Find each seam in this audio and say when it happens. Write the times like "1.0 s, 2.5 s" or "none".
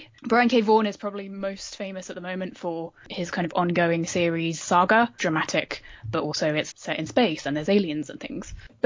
5.2 s, 6.7 s